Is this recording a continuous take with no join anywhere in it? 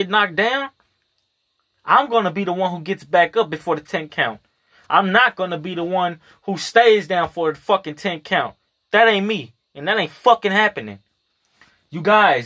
yes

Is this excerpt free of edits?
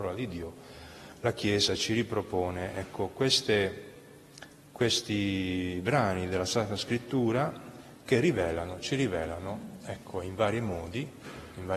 yes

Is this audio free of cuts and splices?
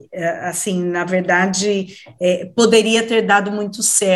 yes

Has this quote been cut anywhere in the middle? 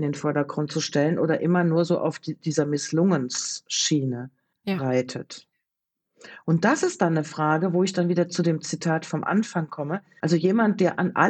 yes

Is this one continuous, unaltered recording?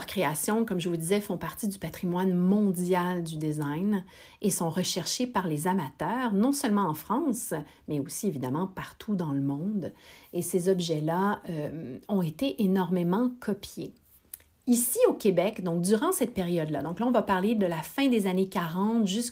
yes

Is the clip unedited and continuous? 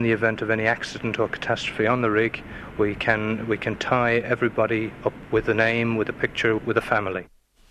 no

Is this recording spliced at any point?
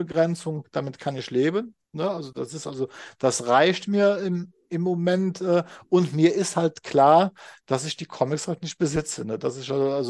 yes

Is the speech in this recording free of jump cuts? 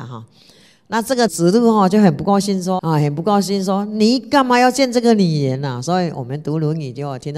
no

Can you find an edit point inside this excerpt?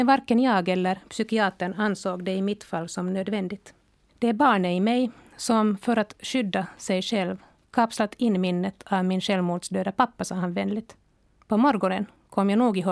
yes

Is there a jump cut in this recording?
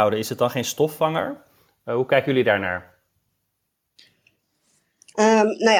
no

